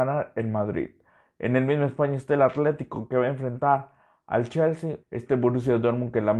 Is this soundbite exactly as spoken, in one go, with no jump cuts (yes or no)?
no